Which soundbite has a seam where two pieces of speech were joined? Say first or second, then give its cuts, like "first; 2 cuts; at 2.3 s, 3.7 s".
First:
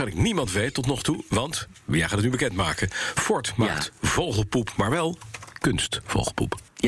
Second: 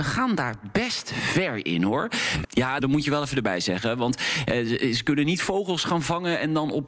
second; 1 cut; at 2.4 s